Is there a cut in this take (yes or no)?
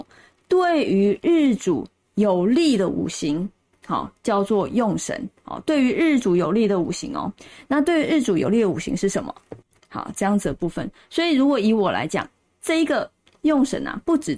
yes